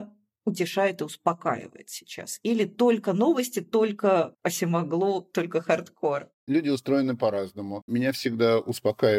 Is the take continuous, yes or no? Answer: yes